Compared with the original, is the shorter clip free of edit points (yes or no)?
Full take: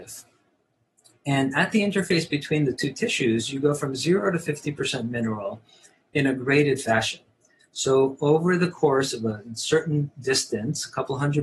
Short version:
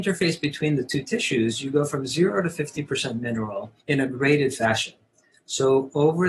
no